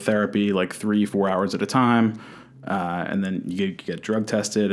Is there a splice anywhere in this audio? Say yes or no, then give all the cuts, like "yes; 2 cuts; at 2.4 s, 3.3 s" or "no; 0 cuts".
yes; 1 cut; at 1.1 s